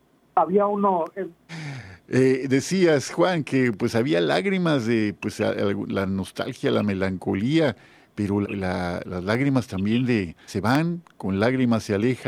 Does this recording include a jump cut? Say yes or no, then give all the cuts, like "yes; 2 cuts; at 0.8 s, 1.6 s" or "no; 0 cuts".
yes; 3 cuts; at 1.5 s, 8.4 s, 10.5 s